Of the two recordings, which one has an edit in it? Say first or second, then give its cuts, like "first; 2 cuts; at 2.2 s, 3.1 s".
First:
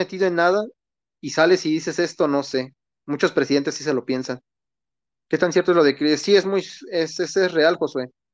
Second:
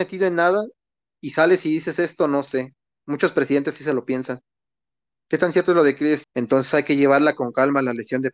second; 1 cut; at 6.2 s